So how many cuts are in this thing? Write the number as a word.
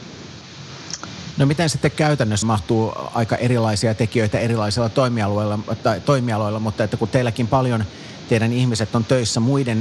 two